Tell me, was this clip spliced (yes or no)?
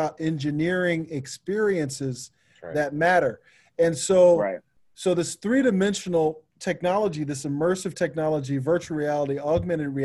no